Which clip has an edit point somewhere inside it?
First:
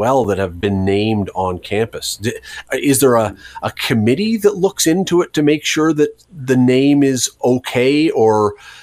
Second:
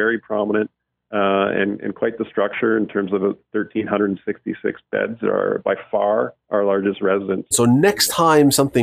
second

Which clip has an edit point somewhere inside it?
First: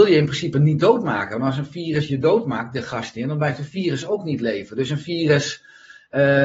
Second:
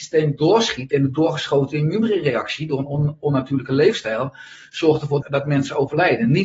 second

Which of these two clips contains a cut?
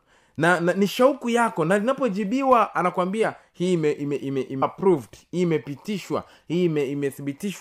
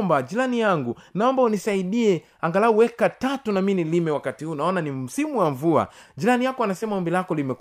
first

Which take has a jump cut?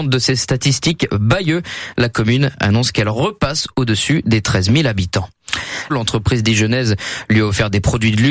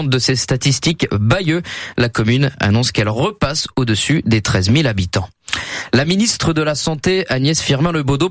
first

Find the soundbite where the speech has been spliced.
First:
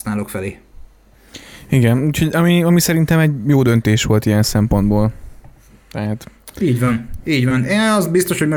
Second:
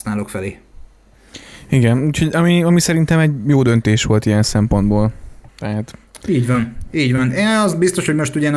second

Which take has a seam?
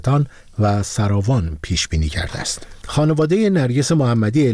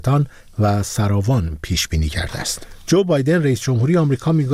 first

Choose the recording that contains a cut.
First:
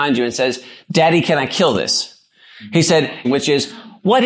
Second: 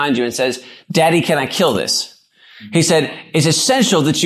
first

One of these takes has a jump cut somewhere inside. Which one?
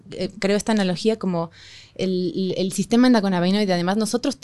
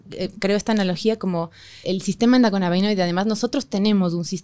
second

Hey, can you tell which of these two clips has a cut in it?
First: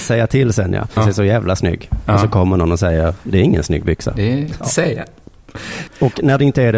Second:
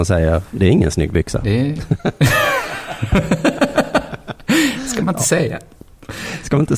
first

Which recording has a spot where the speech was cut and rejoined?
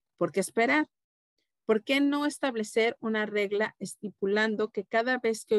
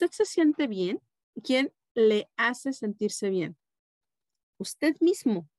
second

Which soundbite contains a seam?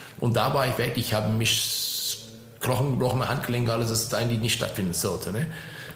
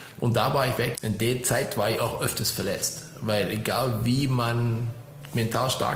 second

